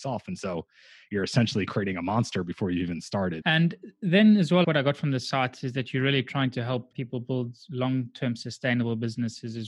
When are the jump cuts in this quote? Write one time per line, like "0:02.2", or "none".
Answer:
0:03.4
0:06.9